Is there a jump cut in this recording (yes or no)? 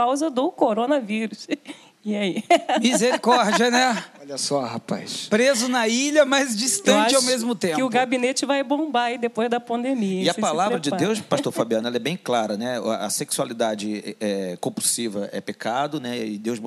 no